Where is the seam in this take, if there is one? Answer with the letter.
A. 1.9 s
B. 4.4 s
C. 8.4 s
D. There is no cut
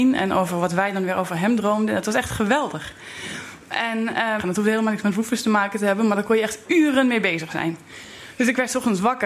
B